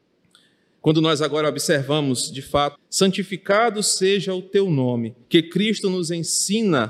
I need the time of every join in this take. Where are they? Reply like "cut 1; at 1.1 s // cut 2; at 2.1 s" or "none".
cut 1; at 2.8 s // cut 2; at 5.2 s